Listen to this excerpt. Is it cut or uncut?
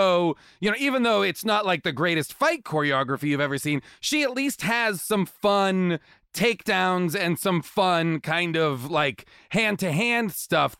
uncut